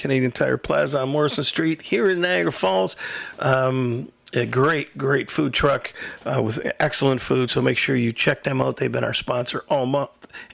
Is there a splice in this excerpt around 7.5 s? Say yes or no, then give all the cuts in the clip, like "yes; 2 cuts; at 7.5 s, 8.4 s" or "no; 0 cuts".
no; 0 cuts